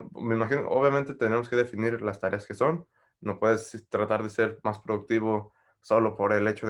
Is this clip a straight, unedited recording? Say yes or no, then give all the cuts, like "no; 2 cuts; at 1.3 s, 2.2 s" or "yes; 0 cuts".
yes; 0 cuts